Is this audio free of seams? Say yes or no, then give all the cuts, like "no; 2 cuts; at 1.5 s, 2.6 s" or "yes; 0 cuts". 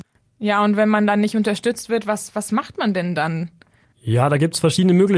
yes; 0 cuts